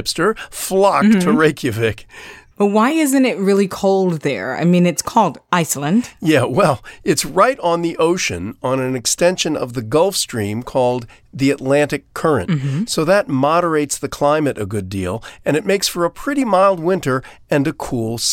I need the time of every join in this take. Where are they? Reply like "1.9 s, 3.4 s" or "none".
2.5 s